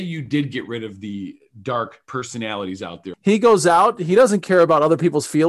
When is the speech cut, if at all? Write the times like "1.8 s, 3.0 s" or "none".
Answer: 3.1 s